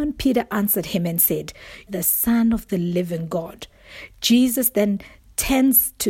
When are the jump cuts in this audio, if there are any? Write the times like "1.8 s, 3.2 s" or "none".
1.9 s